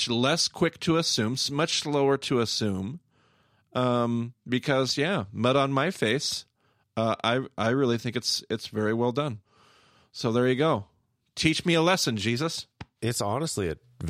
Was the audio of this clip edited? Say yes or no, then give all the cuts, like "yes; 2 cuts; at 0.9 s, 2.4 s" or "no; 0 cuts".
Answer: no; 0 cuts